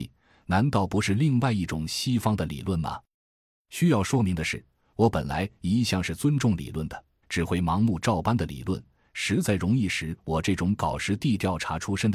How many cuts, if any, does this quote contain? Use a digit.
2